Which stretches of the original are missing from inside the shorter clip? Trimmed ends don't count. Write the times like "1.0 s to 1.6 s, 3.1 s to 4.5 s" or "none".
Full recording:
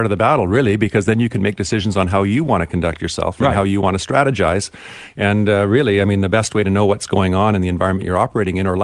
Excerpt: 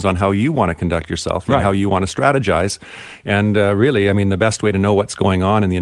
none